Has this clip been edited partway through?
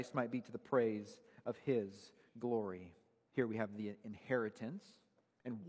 yes; 1 cut; at 3.3 s

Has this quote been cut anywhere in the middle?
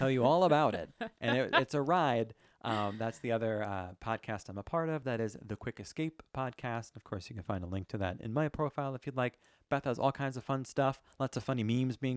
no; 0 cuts

